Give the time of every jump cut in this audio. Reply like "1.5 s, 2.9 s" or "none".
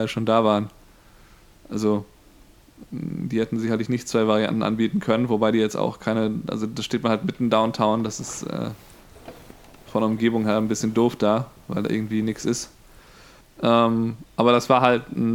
13.4 s